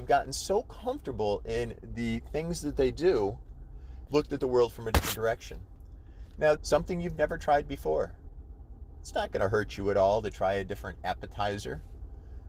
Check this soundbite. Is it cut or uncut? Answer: cut